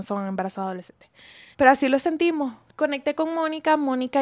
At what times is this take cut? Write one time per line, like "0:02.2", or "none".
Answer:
0:01.5